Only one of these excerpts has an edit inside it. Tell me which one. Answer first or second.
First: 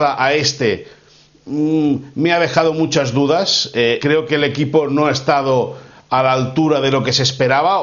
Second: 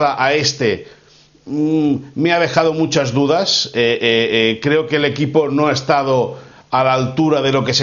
first